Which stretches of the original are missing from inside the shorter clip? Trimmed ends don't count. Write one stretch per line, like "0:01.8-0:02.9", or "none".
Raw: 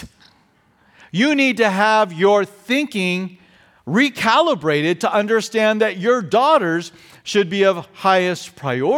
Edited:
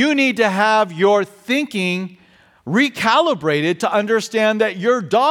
none